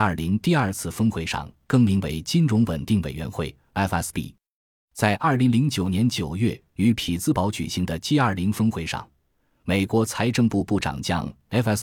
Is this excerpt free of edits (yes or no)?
yes